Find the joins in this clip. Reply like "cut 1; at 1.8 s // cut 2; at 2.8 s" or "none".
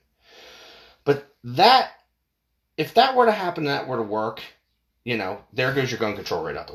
none